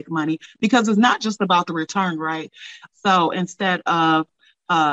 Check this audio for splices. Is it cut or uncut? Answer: cut